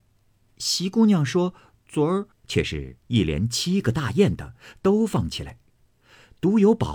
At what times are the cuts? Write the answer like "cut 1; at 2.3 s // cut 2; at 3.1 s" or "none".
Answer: cut 1; at 2.3 s

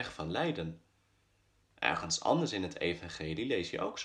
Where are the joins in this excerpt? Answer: cut 1; at 1.6 s

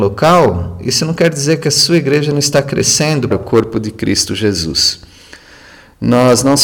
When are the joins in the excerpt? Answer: cut 1; at 3.3 s

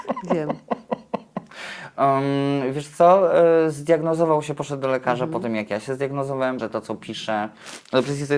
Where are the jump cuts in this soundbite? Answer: cut 1; at 6.6 s

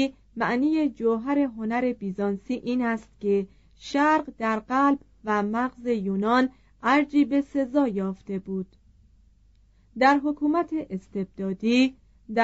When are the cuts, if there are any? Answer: none

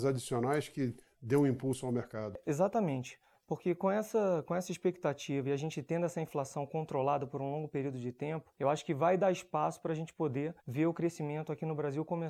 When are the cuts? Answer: cut 1; at 8.5 s // cut 2; at 10.6 s

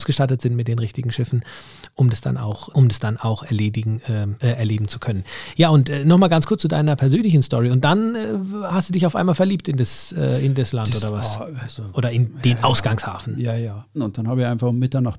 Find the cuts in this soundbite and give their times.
cut 1; at 2.7 s // cut 2; at 14.0 s

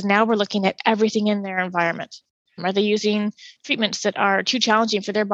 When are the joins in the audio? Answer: cut 1; at 2.6 s

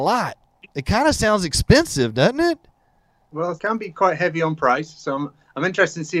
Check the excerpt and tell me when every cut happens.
cut 1; at 3.6 s

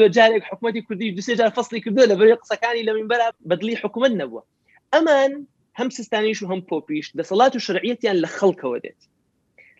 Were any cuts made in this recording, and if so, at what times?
cut 1; at 3.3 s

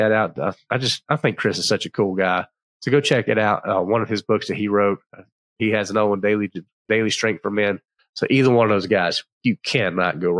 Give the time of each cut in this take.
none

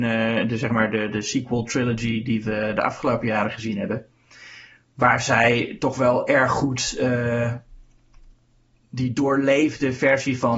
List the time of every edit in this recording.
none

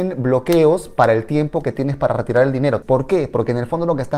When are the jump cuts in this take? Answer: cut 1; at 2.8 s

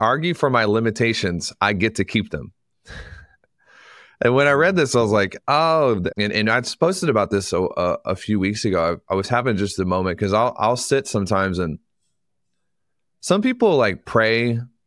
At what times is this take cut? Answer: cut 1; at 6.1 s

